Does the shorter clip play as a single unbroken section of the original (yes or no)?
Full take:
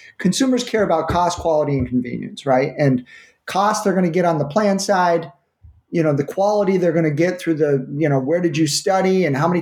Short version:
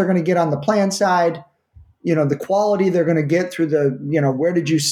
yes